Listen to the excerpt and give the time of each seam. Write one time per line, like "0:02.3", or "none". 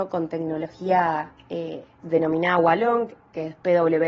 0:02.0

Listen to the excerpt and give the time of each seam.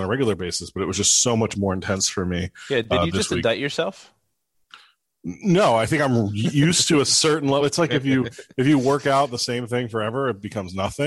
none

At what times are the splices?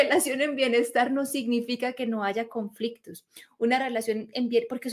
none

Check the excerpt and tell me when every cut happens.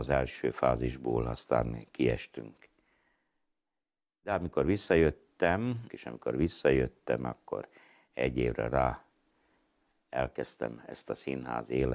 0:05.9

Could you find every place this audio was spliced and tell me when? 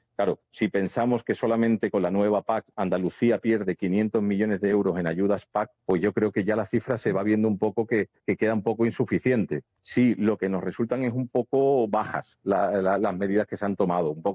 0:05.8
0:09.7

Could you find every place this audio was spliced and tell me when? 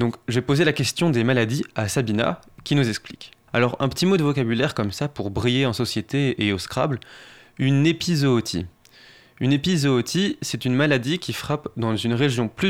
0:03.5

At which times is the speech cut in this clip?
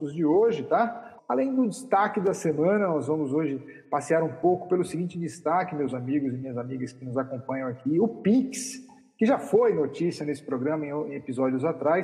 0:01.2

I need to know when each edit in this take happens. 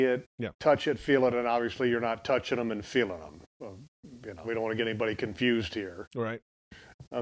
0:04.4

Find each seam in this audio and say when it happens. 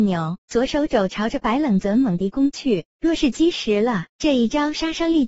none

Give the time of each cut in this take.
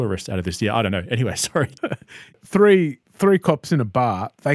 0:01.8
0:03.0

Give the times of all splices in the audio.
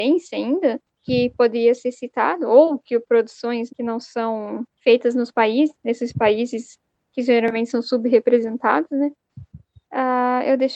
0:03.7

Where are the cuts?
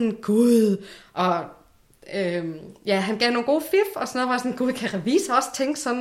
none

